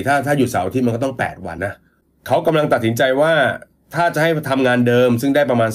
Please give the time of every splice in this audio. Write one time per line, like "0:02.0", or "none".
0:01.6